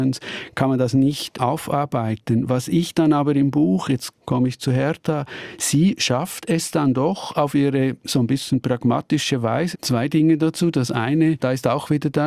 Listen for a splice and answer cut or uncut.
cut